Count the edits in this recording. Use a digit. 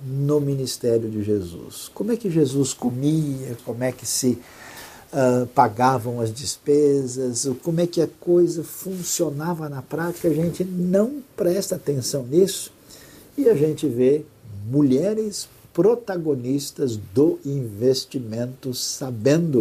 1